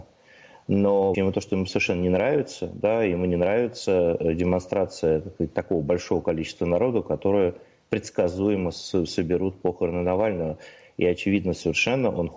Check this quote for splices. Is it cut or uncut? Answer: cut